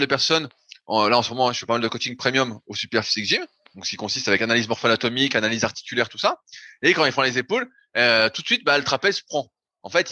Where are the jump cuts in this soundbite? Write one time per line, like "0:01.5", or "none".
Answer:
none